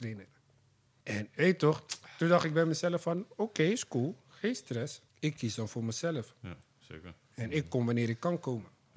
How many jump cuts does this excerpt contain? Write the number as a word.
two